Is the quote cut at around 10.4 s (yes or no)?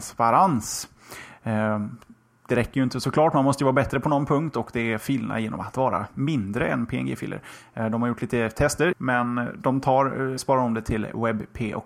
yes